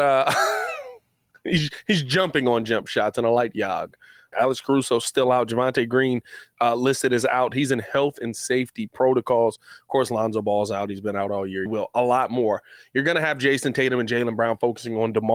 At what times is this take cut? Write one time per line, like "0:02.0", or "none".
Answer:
0:04.3
0:07.5
0:11.7